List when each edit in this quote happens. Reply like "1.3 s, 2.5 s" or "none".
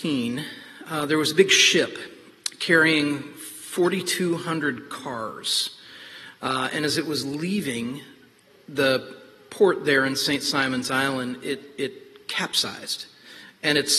none